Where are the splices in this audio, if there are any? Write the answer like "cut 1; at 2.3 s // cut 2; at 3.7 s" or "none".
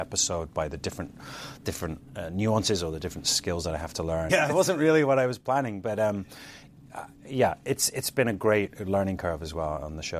cut 1; at 4.3 s